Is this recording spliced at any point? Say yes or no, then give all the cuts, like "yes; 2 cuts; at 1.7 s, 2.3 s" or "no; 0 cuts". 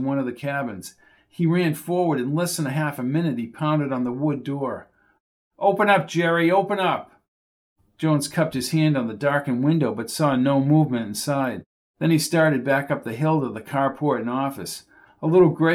no; 0 cuts